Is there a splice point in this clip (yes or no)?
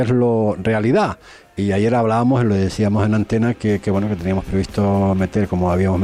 no